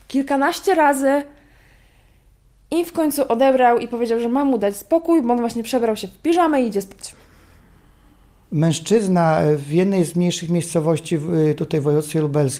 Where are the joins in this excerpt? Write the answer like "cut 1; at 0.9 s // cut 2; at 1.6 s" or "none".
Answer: none